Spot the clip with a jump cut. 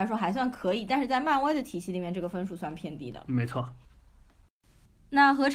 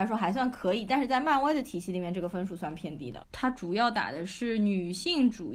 second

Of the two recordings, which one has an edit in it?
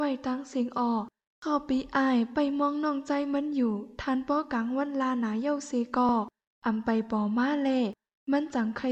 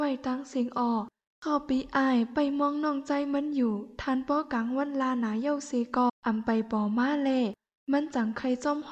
second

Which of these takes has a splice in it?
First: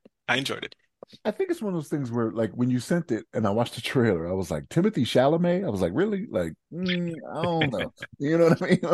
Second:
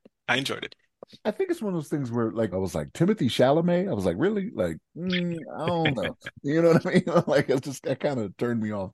second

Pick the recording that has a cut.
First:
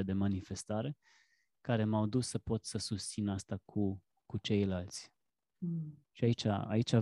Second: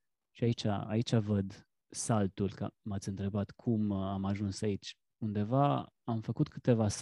first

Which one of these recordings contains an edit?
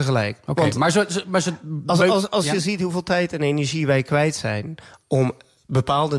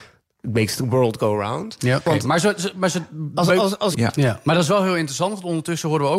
second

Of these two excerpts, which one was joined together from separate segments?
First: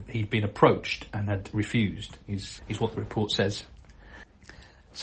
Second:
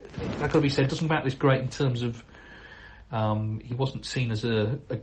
first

